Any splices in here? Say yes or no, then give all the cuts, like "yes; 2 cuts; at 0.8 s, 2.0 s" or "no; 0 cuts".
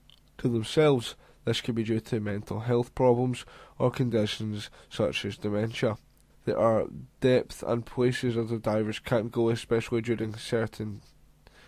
yes; 1 cut; at 6.3 s